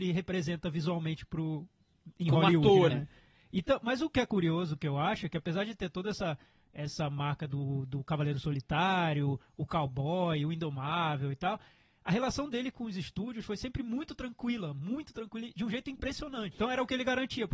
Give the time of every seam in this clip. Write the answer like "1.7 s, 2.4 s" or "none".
2.9 s, 16.5 s